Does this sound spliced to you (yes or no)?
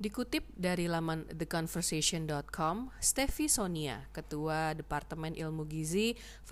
no